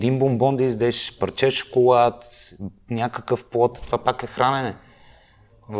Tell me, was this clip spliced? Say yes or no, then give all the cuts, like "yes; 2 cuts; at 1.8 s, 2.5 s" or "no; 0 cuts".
no; 0 cuts